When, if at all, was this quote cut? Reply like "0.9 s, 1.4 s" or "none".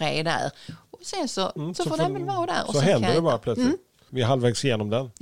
1.6 s, 4.1 s